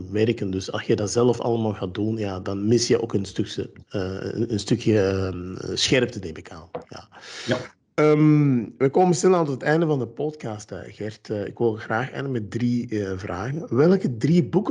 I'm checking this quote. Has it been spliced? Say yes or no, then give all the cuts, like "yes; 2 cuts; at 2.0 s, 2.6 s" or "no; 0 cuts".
no; 0 cuts